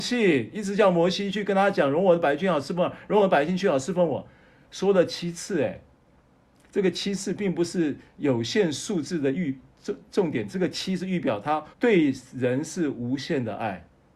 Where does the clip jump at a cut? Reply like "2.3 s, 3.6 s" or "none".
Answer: 10.0 s, 11.7 s